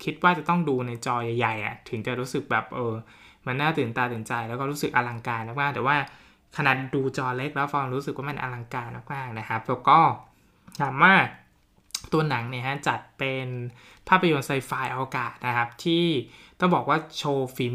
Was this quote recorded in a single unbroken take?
yes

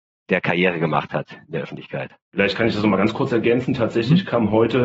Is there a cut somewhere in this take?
no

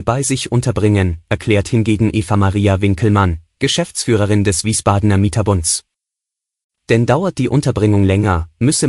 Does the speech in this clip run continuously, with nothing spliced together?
no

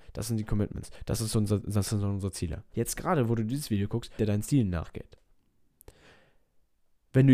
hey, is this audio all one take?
no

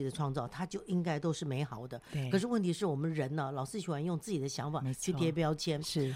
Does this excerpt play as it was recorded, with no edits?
yes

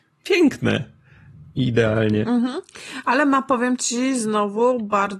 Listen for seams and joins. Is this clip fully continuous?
yes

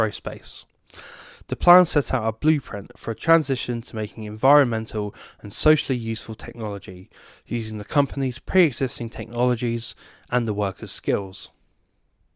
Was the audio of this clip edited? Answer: no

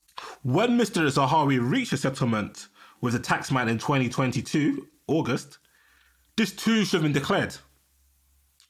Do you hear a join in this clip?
no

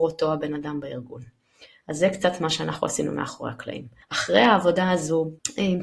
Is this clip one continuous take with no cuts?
yes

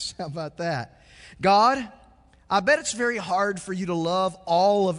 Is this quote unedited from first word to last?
yes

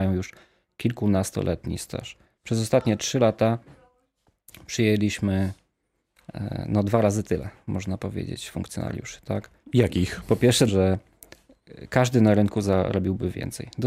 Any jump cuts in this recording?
yes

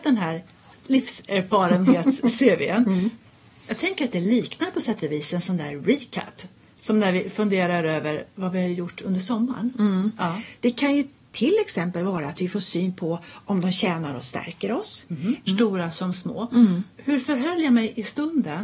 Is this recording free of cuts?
no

